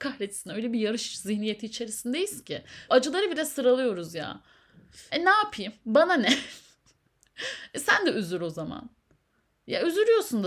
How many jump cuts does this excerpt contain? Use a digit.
2